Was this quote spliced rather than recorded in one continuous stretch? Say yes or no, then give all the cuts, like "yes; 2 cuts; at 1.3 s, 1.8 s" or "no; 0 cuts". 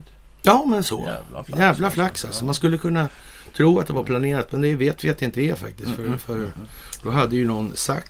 no; 0 cuts